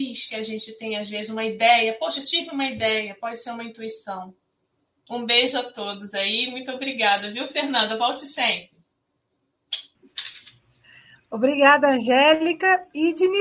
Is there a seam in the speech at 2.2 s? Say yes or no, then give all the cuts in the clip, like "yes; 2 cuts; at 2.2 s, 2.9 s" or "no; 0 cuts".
no; 1 cut; at 5.1 s